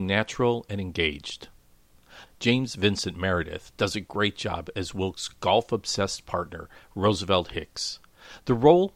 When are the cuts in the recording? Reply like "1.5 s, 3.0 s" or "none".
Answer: 2.3 s